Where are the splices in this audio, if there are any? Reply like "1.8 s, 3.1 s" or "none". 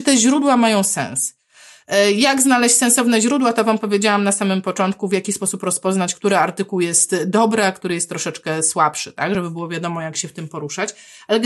none